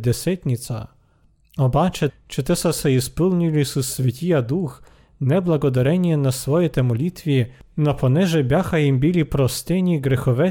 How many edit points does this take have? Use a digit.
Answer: 1